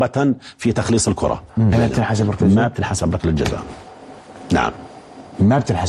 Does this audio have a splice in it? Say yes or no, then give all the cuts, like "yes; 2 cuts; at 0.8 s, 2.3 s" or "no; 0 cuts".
yes; 1 cut; at 1.7 s